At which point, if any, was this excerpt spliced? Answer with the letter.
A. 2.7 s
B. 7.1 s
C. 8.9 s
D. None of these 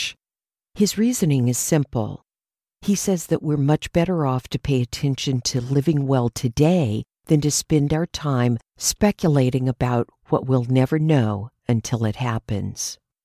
B